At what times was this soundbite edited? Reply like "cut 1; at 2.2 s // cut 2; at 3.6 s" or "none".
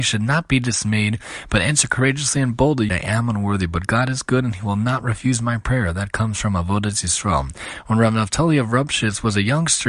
cut 1; at 2.9 s